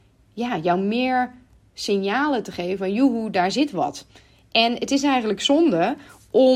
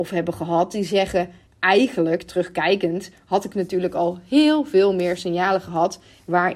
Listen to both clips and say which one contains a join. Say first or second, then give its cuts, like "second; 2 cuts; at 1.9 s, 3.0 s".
second; 1 cut; at 1.5 s